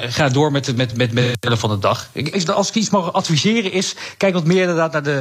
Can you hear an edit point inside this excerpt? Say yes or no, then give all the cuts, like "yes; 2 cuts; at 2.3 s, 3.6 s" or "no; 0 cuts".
yes; 2 cuts; at 0.9 s, 2.3 s